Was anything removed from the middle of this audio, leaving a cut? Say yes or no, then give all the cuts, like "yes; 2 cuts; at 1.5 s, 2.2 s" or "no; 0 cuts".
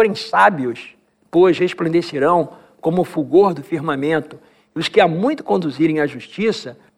no; 0 cuts